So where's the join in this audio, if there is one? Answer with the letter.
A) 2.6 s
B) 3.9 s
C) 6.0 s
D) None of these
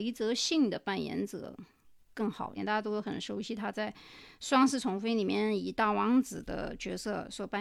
A